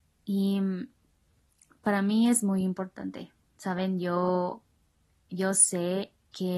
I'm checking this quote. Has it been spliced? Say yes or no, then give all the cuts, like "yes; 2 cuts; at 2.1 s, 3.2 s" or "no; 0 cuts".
no; 0 cuts